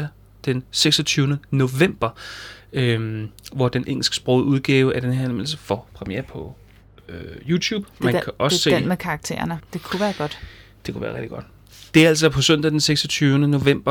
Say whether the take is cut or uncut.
cut